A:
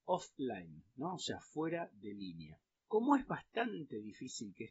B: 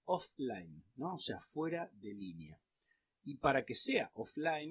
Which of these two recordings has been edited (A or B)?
A